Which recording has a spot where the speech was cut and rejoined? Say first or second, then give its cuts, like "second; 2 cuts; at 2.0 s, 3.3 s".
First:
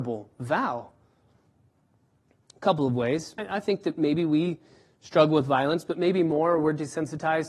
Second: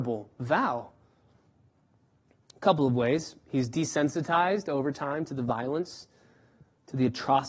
first; 1 cut; at 3.4 s